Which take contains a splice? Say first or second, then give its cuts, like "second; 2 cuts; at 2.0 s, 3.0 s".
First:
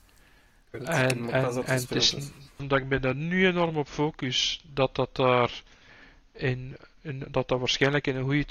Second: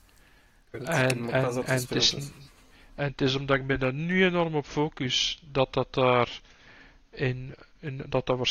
first; 1 cut; at 2.6 s